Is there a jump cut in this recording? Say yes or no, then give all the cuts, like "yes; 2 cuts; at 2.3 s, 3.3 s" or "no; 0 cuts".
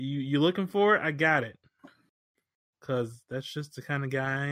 no; 0 cuts